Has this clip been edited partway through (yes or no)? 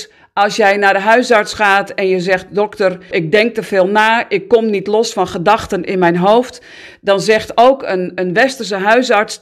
yes